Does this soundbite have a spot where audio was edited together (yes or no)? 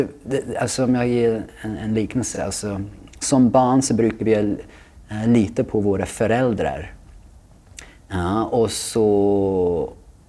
no